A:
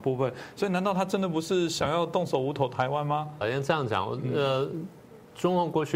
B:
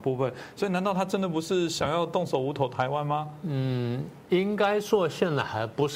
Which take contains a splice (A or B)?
A